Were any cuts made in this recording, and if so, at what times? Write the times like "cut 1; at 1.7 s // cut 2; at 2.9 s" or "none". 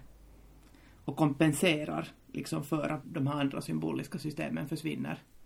cut 1; at 3.0 s

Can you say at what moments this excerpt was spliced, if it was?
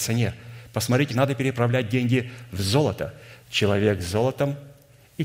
cut 1; at 1.1 s // cut 2; at 3.4 s

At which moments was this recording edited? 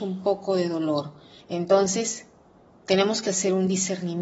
cut 1; at 1.4 s

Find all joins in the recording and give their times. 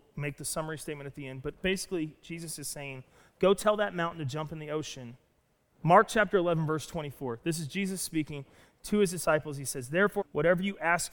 cut 1; at 5.7 s // cut 2; at 10.2 s

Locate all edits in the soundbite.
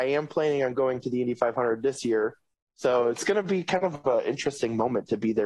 cut 1; at 2.6 s

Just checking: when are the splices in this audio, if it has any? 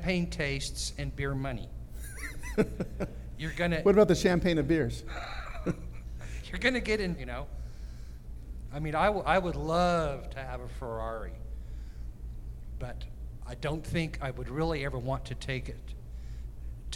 cut 1; at 7.2 s

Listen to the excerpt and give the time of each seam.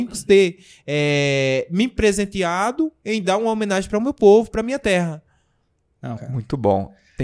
cut 1; at 6.2 s

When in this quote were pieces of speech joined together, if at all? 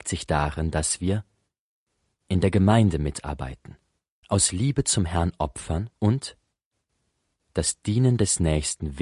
cut 1; at 4.2 s // cut 2; at 6.0 s

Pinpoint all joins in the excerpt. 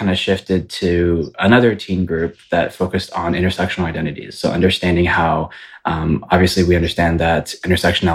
none

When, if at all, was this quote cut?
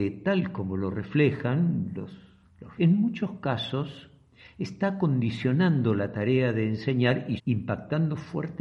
cut 1; at 2.8 s // cut 2; at 7.4 s

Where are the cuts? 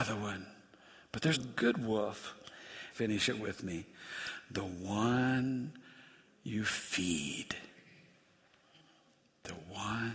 cut 1; at 1.3 s // cut 2; at 2.9 s

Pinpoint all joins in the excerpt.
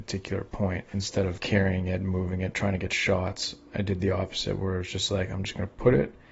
cut 1; at 1.4 s

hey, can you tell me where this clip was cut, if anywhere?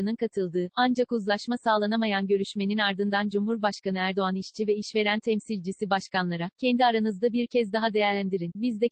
none

